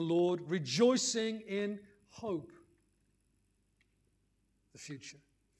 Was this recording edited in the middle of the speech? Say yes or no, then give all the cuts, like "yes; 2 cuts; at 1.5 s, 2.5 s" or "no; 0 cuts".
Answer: no; 0 cuts